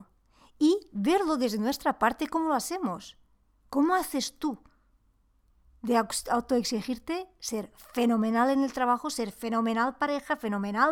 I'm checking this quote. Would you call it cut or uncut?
uncut